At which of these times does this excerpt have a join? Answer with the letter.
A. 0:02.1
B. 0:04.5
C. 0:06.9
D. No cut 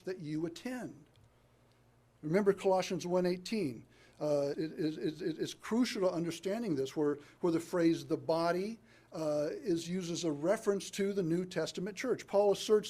B